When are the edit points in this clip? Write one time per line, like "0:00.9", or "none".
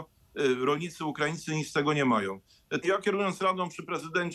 0:02.8